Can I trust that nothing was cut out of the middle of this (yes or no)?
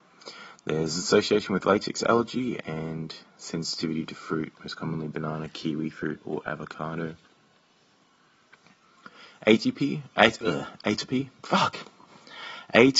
yes